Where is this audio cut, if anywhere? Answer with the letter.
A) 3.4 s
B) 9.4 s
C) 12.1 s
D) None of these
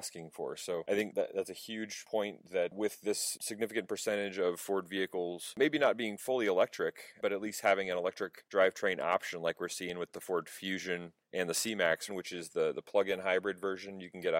C